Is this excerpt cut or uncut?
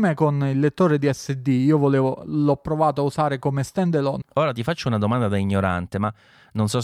cut